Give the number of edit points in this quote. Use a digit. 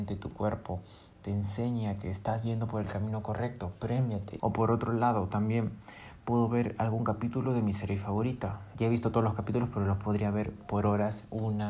2